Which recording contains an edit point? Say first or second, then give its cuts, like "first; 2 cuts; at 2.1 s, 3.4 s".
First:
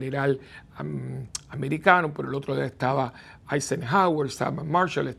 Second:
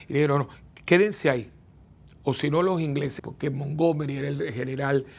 second; 1 cut; at 3.2 s